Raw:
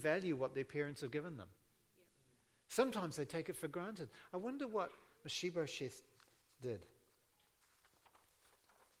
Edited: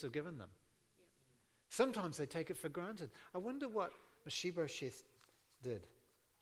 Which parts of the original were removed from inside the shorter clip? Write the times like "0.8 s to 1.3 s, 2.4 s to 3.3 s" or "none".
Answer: none